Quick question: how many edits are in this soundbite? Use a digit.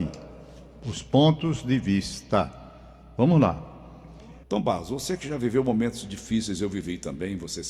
1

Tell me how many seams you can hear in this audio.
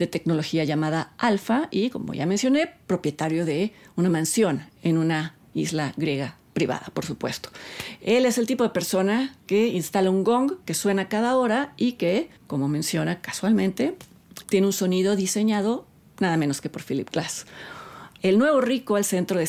3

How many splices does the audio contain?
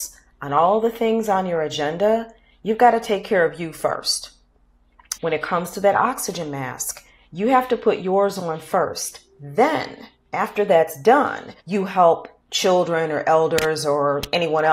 2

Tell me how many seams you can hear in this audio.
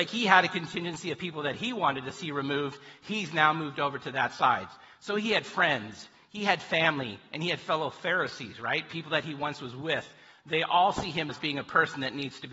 1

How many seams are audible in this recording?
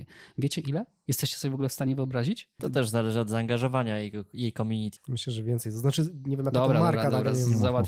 2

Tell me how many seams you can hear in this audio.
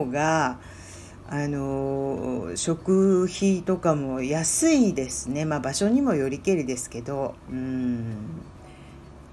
1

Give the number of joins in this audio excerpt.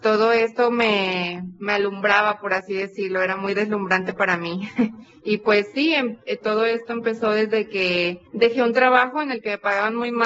1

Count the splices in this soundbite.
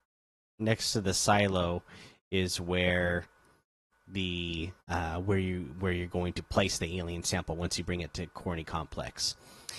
1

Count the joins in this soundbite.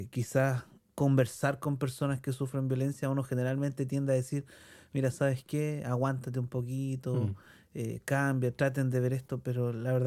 0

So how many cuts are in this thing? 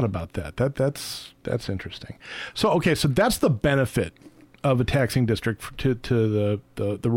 0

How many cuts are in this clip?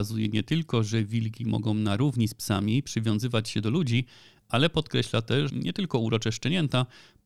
1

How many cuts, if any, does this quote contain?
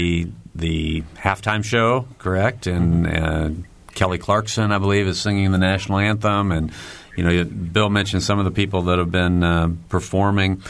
0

